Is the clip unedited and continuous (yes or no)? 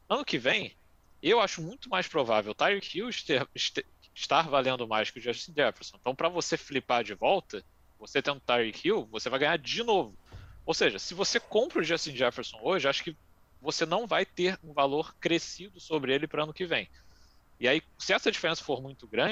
yes